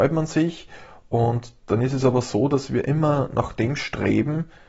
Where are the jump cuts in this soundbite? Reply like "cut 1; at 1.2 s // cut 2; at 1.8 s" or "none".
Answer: none